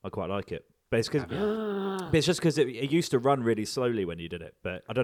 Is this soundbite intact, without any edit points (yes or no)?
yes